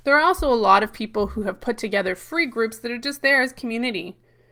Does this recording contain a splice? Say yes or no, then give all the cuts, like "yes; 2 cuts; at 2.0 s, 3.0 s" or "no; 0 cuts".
no; 0 cuts